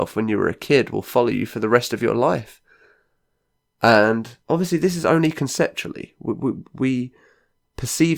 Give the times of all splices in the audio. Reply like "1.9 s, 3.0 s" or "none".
4.4 s